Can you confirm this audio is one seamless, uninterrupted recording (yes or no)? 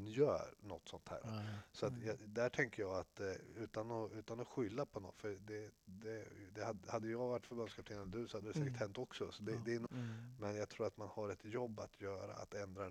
no